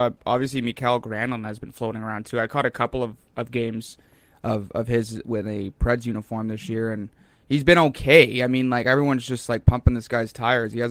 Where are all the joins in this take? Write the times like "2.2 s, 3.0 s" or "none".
none